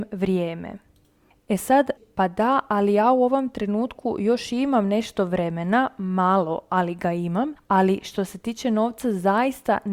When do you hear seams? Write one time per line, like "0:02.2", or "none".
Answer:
0:02.0

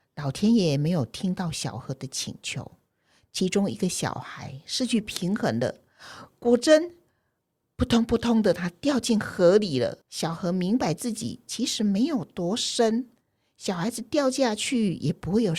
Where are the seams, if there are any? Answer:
0:10.0

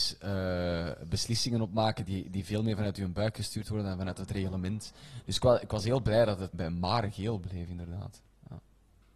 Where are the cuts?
0:06.5

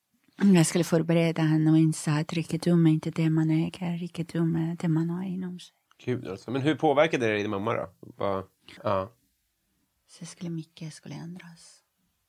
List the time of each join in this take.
0:05.9
0:08.8

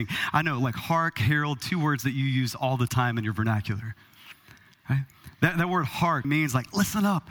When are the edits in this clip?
0:06.2

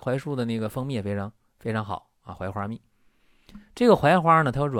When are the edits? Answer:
none

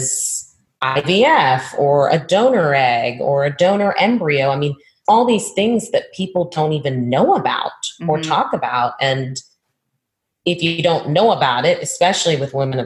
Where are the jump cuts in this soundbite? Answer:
0:05.0

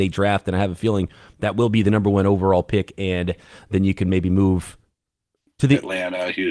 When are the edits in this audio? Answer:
0:05.5

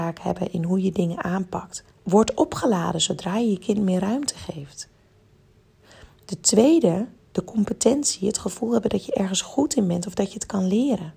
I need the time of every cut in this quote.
0:02.0

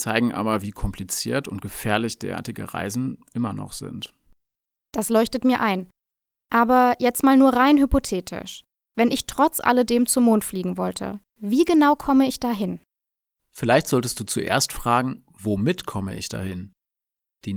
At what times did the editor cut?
none

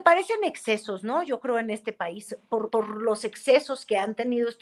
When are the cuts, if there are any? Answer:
0:02.7

